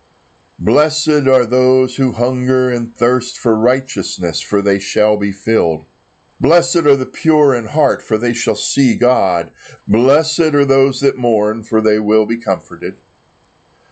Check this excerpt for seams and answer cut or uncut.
cut